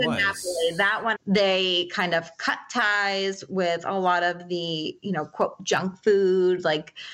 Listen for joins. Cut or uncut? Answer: cut